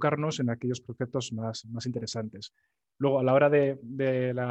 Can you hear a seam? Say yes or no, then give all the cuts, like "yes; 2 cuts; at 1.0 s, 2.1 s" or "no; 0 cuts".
no; 0 cuts